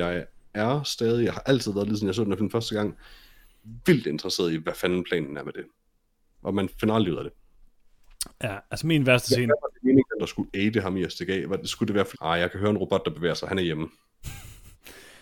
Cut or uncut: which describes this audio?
cut